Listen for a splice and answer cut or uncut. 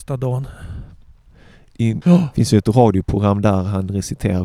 cut